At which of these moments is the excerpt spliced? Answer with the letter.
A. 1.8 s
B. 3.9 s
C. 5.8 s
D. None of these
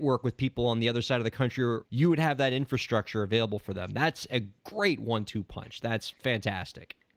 A